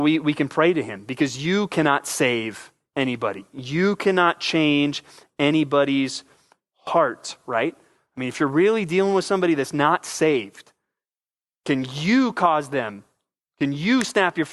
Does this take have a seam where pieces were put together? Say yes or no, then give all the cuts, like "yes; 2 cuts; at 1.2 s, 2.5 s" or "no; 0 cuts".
no; 0 cuts